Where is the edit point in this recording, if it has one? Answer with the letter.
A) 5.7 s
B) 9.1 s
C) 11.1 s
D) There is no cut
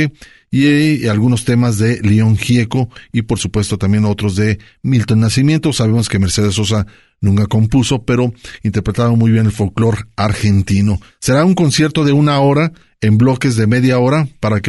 C